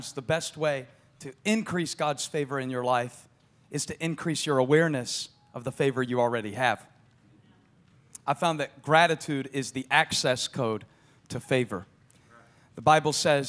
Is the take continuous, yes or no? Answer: yes